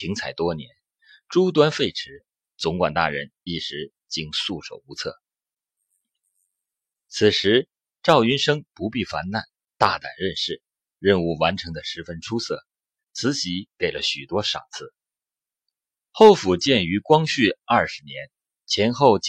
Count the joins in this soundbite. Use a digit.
1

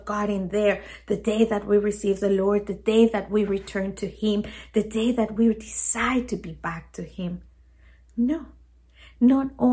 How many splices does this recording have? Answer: 0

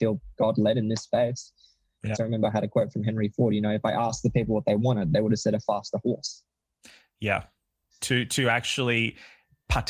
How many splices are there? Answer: 2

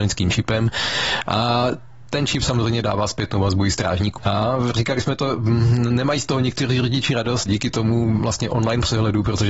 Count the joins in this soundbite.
2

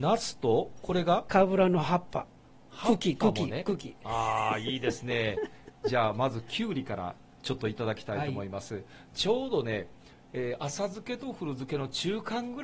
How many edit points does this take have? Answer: 0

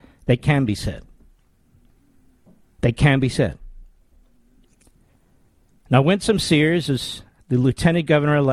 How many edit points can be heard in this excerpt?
0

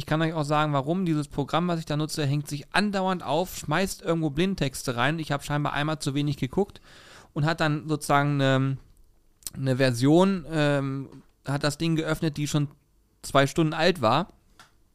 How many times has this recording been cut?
0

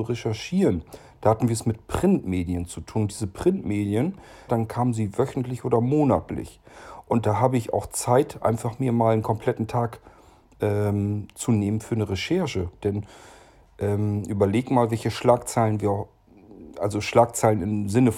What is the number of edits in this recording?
2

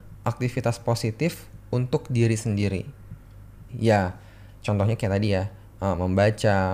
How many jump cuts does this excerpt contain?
2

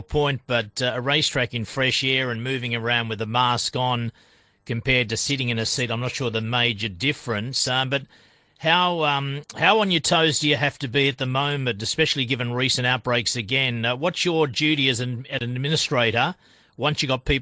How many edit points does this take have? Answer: 0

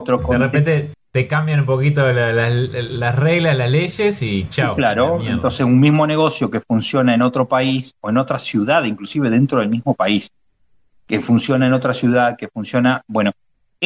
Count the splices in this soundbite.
0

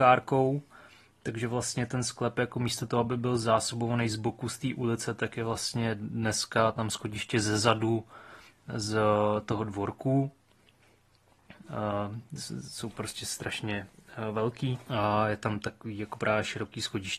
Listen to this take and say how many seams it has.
2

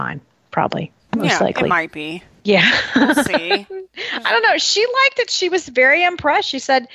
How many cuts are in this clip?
0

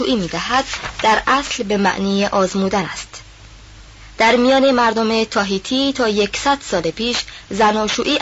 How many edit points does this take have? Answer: 0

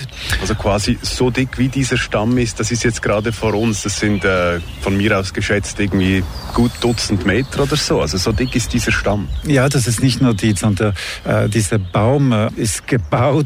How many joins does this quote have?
1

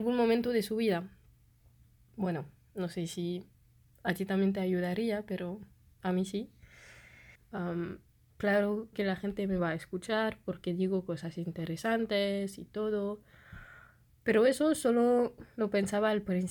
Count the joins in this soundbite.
2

